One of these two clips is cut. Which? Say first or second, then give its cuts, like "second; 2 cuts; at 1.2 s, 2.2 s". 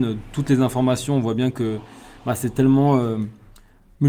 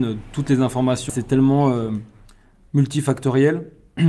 second; 1 cut; at 1.1 s